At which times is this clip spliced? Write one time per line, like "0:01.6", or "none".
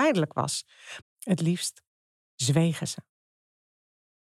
0:01.0